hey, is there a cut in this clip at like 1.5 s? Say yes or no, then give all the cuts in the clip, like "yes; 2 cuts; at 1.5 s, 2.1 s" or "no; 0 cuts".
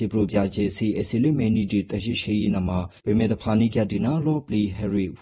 no; 1 cut; at 3.0 s